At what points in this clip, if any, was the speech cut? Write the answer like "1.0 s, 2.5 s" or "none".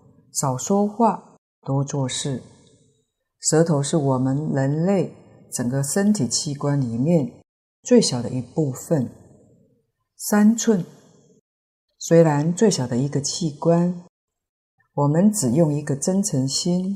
14.8 s